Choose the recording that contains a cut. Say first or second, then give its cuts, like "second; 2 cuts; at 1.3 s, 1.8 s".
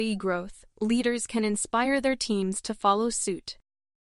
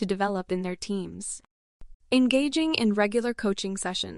second; 1 cut; at 1.9 s